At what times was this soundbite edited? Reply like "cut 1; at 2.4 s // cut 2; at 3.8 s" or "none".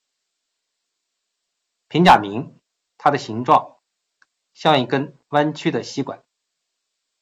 none